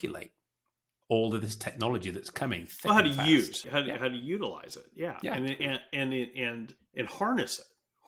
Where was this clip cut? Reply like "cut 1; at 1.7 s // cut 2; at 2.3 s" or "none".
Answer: cut 1; at 3.6 s // cut 2; at 5.6 s // cut 3; at 6.8 s